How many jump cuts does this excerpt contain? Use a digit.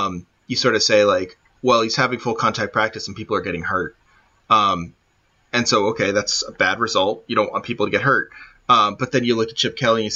0